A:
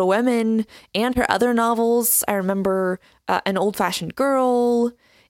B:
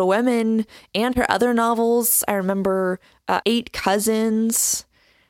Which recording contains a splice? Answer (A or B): B